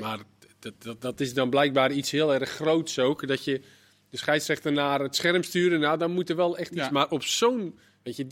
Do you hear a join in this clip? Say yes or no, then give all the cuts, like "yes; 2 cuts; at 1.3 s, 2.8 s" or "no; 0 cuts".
no; 0 cuts